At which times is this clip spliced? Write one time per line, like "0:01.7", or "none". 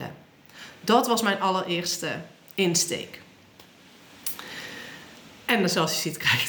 none